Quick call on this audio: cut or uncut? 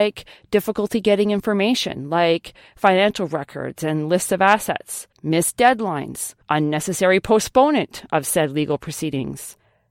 cut